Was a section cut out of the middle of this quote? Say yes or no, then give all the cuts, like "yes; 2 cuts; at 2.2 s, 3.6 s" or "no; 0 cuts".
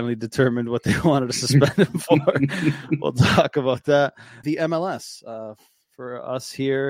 yes; 1 cut; at 4.4 s